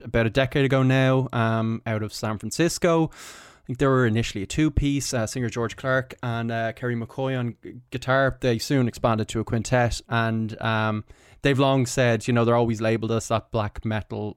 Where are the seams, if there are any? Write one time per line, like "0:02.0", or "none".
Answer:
0:10.0